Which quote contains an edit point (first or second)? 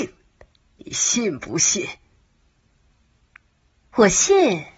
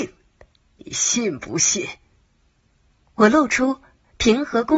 second